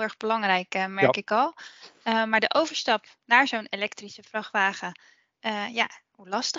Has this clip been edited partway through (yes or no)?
no